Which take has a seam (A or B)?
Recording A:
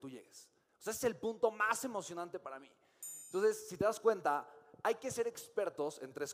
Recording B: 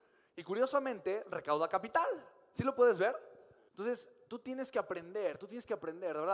B